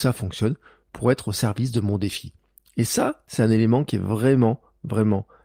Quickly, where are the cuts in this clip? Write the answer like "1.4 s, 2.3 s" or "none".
none